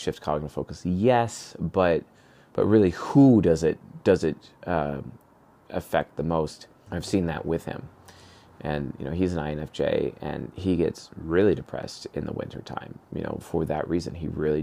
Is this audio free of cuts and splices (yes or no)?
no